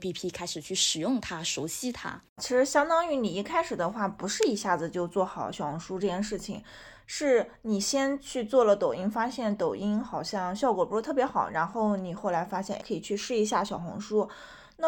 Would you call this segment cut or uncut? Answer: uncut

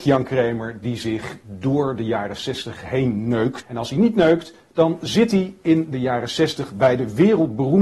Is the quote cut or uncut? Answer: cut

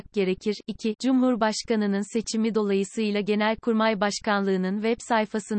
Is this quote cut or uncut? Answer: cut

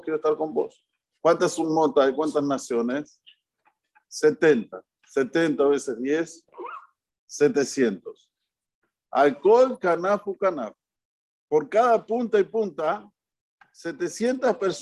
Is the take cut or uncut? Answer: uncut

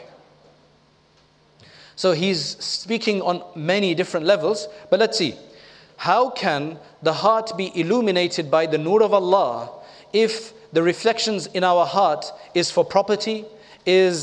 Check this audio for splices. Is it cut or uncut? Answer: cut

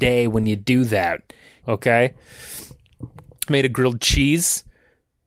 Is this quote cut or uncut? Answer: cut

